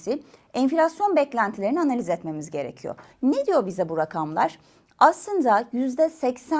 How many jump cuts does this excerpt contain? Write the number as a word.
one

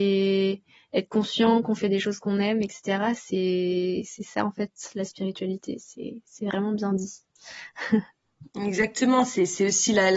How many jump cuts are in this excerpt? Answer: one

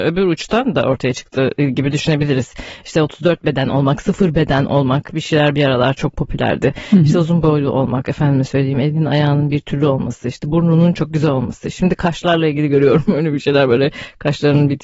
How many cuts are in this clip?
one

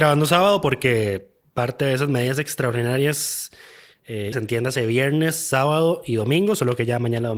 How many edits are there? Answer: one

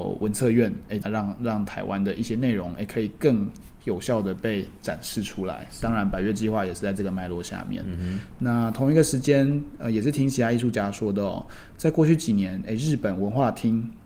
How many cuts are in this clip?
one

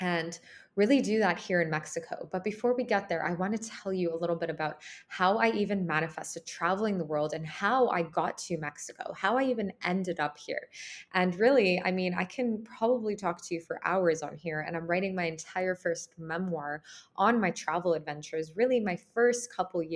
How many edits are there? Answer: zero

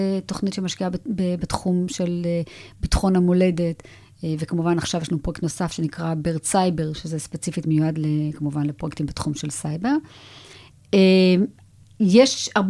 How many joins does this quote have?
zero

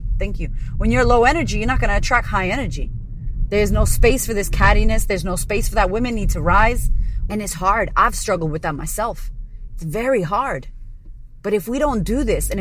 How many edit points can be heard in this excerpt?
two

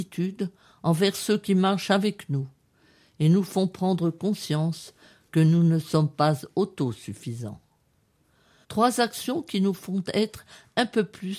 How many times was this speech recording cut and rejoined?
one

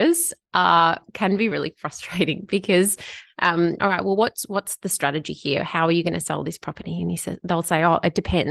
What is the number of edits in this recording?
two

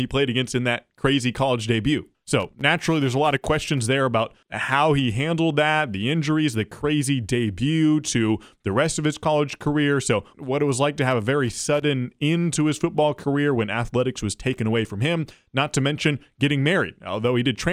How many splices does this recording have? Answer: one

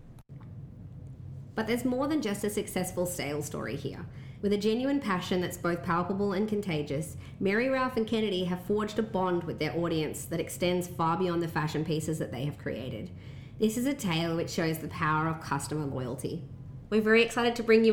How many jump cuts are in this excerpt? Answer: two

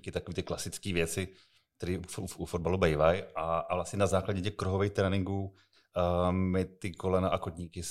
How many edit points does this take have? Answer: zero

